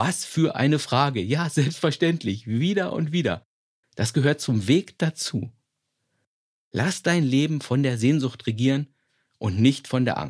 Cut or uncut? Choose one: cut